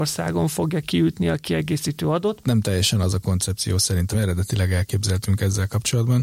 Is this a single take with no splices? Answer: no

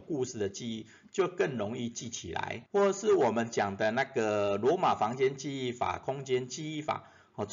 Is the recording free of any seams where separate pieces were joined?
no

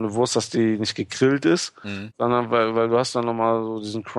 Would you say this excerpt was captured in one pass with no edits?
yes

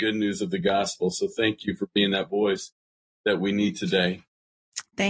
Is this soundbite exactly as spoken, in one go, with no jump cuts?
yes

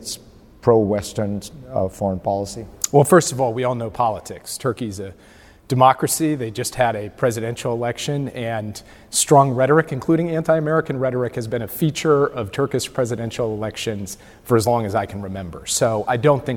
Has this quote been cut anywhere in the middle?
no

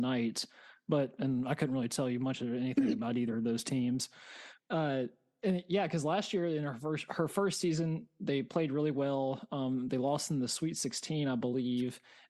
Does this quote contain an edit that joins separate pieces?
yes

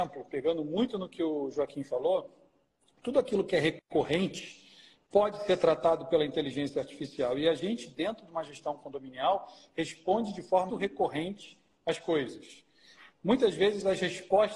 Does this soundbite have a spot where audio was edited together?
yes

